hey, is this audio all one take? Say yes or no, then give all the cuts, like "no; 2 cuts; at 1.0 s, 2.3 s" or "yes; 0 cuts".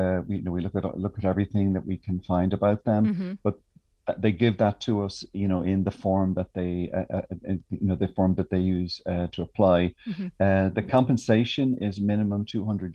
yes; 0 cuts